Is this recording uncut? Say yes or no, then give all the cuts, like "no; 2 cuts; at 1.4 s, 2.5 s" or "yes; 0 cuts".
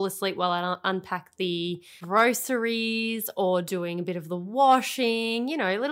yes; 0 cuts